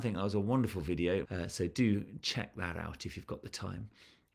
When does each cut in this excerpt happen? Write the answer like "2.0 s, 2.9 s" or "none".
1.2 s